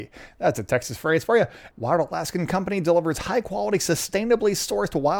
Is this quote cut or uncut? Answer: cut